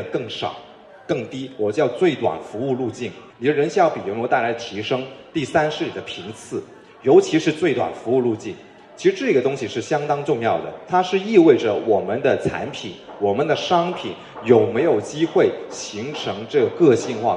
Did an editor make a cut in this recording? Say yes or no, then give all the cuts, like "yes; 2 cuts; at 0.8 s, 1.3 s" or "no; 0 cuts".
yes; 1 cut; at 3.3 s